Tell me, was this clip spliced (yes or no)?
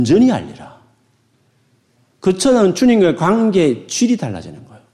no